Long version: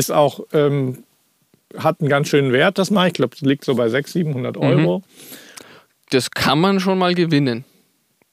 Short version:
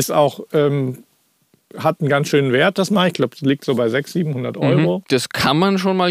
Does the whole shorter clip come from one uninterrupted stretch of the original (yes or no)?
no